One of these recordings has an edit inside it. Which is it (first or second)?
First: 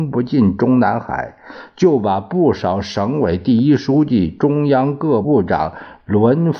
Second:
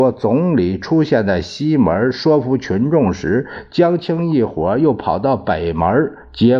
first